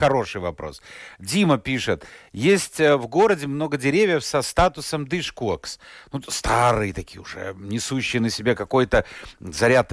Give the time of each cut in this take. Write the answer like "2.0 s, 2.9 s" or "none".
none